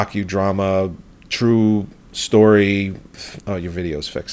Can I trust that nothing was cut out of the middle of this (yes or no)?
no